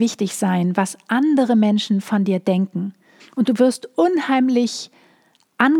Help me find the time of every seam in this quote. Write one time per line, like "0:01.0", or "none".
0:03.2